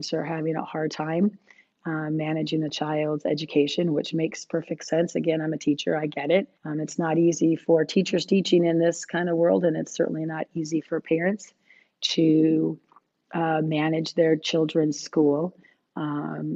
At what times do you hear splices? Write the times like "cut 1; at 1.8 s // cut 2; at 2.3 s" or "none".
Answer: cut 1; at 6.5 s